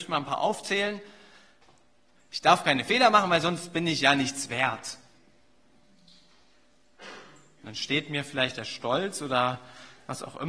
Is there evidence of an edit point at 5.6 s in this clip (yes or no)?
no